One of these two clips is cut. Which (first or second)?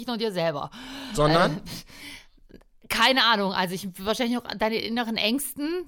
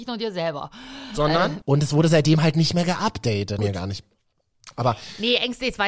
second